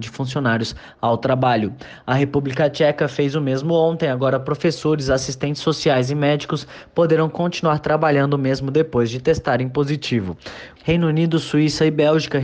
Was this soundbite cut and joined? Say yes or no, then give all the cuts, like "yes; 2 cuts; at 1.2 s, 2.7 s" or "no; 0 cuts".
yes; 1 cut; at 10.8 s